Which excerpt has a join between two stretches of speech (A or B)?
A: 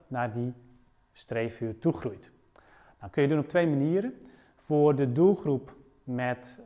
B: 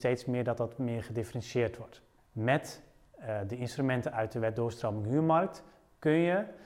B